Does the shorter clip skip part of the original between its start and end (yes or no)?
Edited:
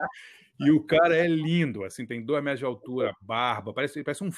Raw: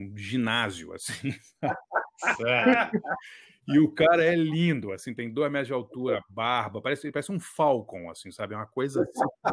no